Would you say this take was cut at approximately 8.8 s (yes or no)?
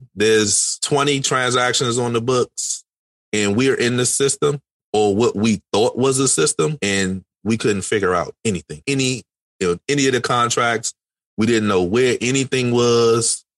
yes